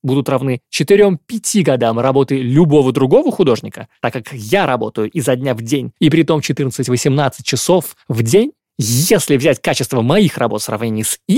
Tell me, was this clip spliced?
yes; 1 cut; at 6.0 s

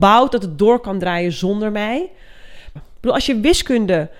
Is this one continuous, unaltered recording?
no; 1 cut; at 2.8 s

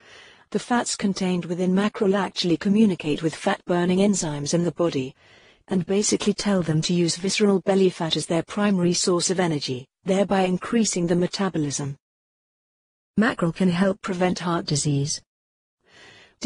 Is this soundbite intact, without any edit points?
yes; 0 cuts

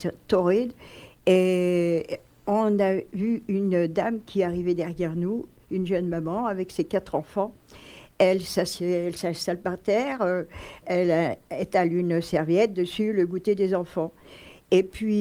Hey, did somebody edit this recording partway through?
yes; 1 cut; at 10.8 s

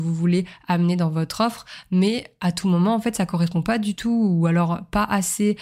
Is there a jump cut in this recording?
no; 0 cuts

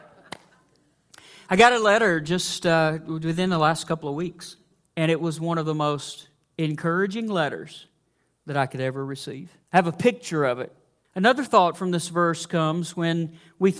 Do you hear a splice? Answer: yes; 2 cuts; at 9.6 s, 11.0 s

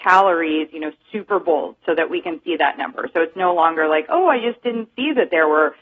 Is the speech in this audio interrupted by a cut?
no; 0 cuts

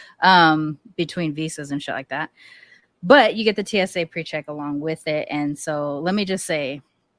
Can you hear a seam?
no; 0 cuts

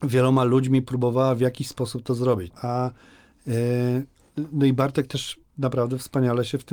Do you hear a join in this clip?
yes; 1 cut; at 2.5 s

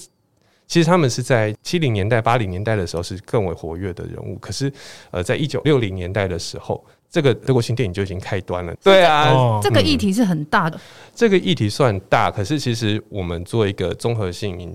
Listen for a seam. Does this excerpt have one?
yes; 2 cuts; at 8.7 s, 10.7 s

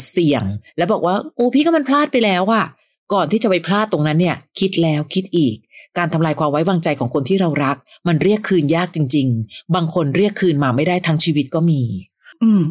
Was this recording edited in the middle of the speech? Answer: no; 0 cuts

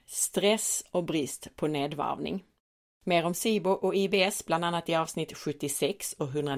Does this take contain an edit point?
yes; 1 cut; at 2.9 s

